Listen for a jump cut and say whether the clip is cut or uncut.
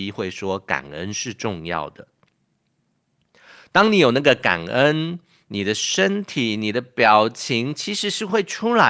uncut